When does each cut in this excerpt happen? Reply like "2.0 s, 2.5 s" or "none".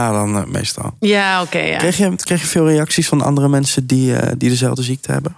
none